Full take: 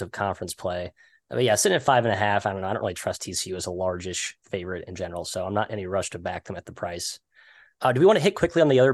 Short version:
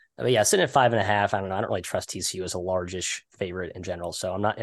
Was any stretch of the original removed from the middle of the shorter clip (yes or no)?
no